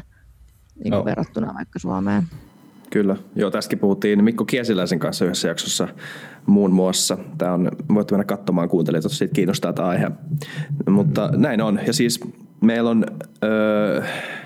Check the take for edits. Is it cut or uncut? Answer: uncut